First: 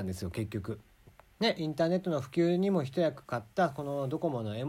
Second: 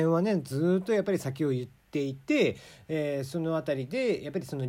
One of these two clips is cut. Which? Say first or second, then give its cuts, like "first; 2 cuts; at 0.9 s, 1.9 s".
first; 1 cut; at 1.3 s